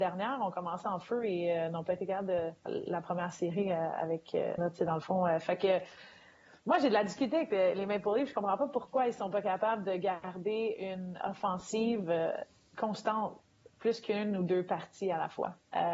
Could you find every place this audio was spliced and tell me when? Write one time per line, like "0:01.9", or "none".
0:02.7
0:04.6
0:11.2